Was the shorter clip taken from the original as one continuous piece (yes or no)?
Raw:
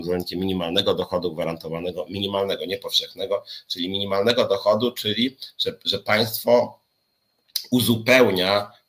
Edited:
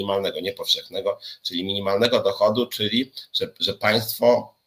yes